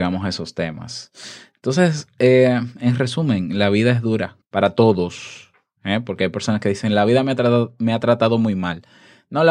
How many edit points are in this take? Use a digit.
1